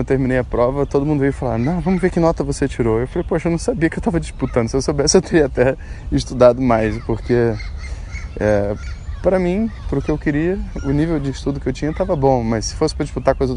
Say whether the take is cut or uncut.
uncut